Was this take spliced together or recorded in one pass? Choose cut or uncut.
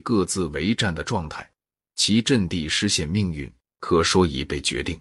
cut